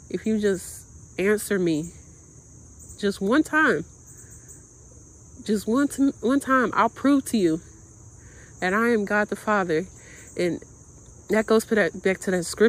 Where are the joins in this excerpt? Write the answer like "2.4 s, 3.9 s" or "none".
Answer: none